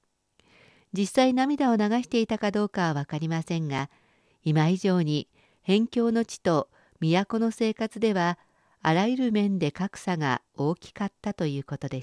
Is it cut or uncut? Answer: uncut